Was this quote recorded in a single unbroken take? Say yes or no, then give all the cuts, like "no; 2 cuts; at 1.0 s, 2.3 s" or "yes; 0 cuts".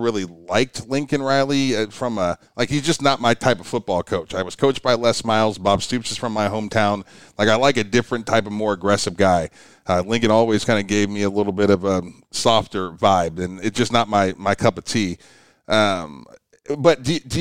yes; 0 cuts